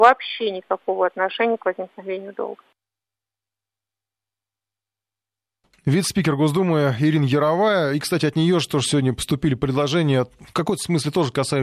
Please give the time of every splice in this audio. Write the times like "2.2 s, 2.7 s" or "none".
none

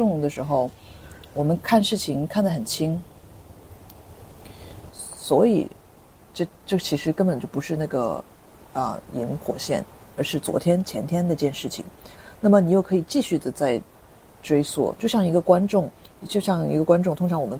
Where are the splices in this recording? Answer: 4.9 s

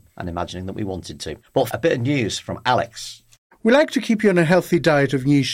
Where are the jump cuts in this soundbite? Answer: 1.7 s

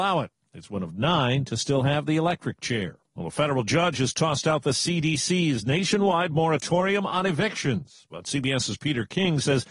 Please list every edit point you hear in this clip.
3.1 s

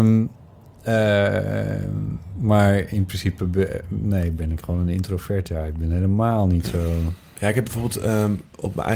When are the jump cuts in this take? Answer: none

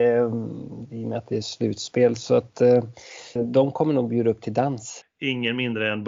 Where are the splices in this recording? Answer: 3.4 s, 5.0 s

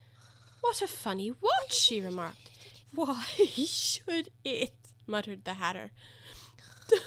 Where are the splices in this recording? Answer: 2.8 s

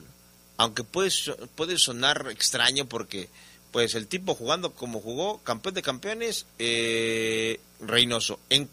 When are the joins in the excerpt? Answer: 6.5 s, 7.6 s

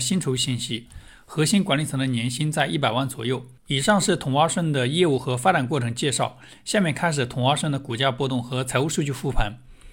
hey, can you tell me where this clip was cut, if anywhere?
none

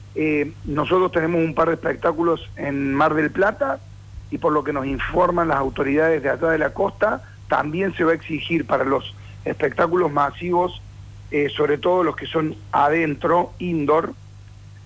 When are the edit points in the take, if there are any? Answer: none

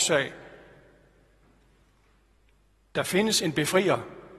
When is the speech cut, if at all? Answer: none

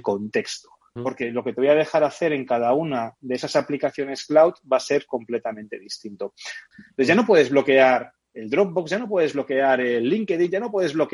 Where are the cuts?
1.0 s, 6.7 s

